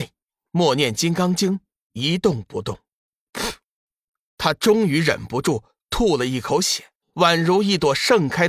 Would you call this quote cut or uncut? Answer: cut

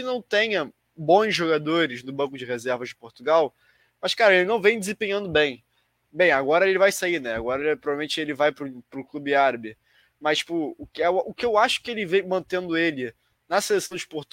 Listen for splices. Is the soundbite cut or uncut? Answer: cut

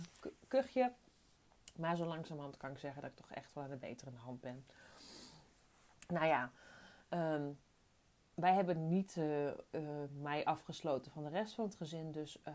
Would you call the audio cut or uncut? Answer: uncut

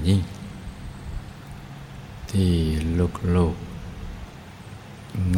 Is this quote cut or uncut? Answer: uncut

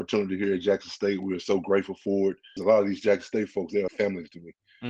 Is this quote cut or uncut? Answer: cut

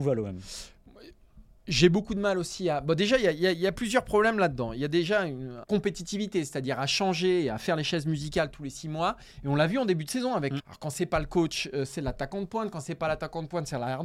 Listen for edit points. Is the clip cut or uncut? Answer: cut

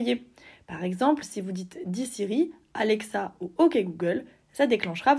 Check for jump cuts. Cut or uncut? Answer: uncut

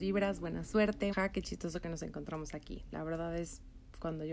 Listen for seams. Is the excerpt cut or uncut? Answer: cut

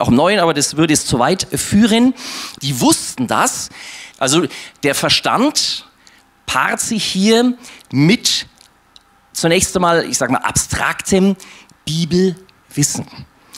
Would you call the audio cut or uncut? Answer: cut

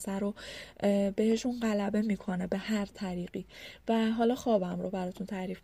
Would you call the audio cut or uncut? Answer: uncut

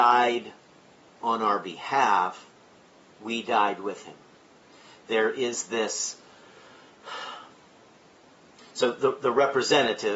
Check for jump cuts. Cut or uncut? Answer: uncut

